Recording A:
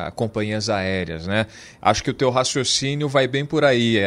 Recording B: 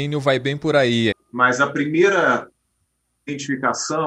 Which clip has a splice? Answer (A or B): B